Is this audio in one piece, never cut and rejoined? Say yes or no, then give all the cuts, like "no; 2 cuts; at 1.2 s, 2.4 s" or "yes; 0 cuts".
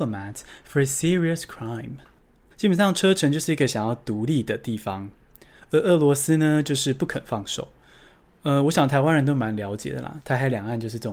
no; 1 cut; at 2.5 s